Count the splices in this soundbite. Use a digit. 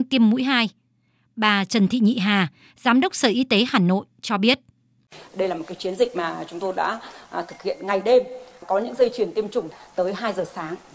0